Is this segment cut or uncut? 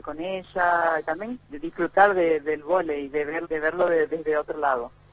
cut